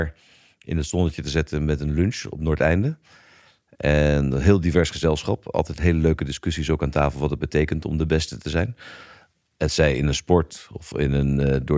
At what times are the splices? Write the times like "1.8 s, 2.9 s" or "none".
none